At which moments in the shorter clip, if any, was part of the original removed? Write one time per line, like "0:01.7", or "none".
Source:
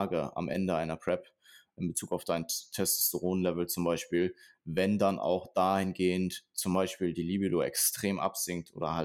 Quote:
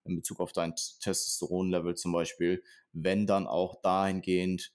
none